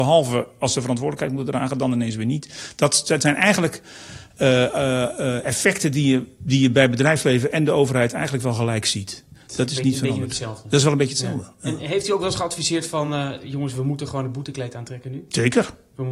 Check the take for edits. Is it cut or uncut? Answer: uncut